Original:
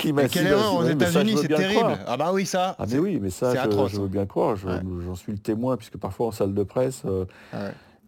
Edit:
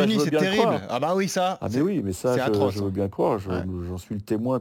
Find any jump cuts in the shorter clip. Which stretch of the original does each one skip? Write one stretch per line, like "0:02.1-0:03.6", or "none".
none